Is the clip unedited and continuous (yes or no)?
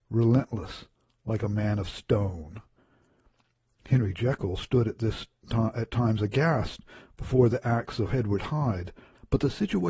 yes